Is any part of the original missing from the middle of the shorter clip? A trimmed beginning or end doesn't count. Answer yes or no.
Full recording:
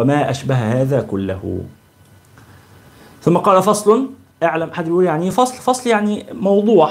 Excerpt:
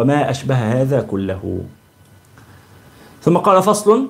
no